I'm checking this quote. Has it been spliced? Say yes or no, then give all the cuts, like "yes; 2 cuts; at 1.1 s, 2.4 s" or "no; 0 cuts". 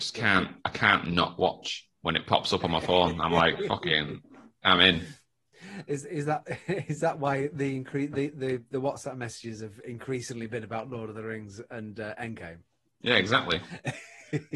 yes; 1 cut; at 1.9 s